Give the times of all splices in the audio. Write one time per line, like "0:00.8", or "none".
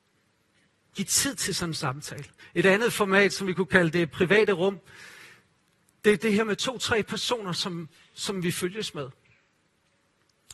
0:02.4